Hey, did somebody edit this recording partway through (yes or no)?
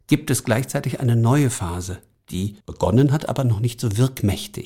yes